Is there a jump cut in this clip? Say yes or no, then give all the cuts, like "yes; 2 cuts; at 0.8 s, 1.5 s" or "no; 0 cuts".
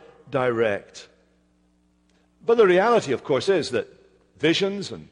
no; 0 cuts